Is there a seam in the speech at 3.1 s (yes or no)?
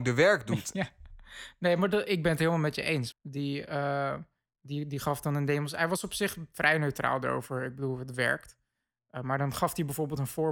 yes